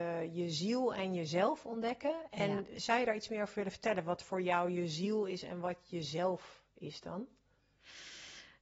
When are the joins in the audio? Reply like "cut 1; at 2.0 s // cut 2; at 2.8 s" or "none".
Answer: none